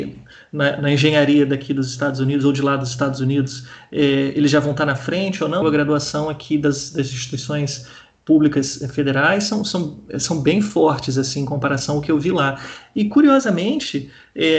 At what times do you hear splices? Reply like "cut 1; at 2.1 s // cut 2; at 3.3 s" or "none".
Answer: cut 1; at 5.6 s